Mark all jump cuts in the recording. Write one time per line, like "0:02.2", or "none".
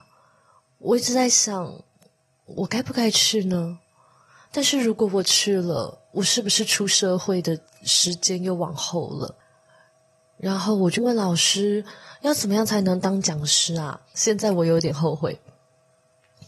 0:11.0
0:14.1